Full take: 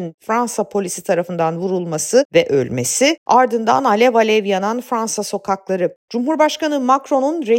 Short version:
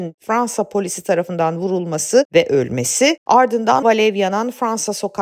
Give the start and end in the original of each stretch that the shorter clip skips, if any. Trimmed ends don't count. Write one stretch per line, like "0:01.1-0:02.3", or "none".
0:03.8-0:04.1